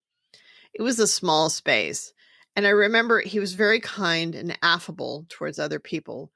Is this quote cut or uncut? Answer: uncut